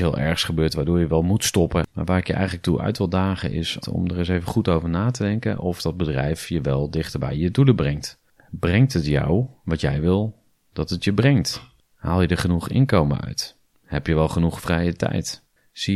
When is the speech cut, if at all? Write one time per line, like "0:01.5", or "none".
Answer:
0:03.8